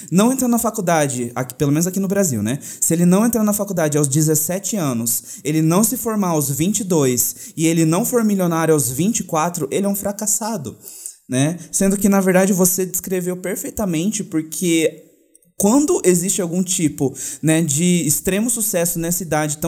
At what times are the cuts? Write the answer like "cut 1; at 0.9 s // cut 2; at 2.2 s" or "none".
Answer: none